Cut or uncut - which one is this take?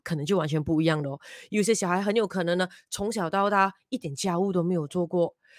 uncut